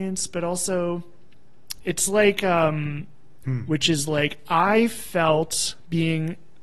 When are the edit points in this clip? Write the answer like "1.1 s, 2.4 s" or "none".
1.8 s, 3.4 s